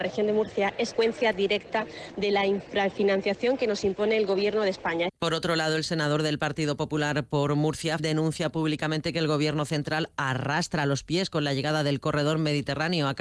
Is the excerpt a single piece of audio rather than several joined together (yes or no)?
no